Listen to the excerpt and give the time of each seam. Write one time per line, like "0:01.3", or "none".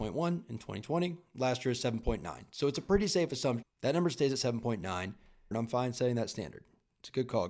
0:03.6
0:05.5